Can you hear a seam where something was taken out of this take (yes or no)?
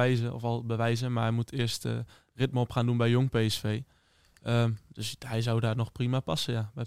no